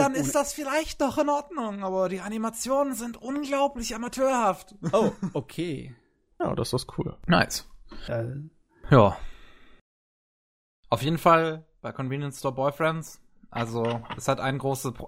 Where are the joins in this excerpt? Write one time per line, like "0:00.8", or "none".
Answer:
0:06.4

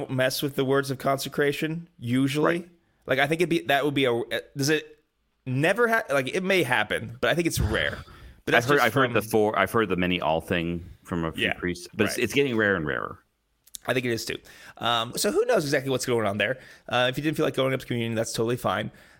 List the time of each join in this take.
0:11.9
0:15.1

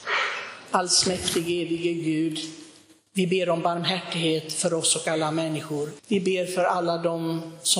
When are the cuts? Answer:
0:06.0

